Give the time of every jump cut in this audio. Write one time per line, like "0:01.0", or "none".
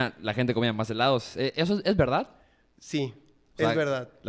none